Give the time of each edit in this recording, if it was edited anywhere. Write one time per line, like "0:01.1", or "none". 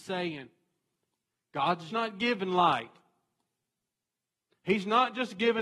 0:01.9